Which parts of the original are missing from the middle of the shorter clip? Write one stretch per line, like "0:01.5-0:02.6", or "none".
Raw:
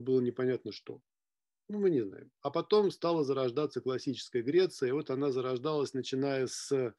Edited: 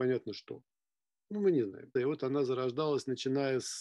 0:02.3-0:04.8